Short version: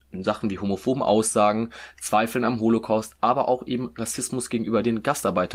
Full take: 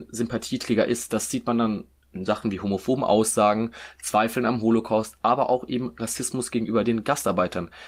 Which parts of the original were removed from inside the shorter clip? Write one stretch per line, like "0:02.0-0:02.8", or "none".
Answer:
none